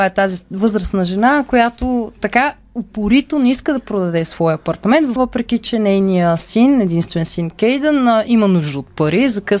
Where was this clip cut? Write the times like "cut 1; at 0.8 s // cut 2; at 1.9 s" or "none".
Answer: cut 1; at 5.2 s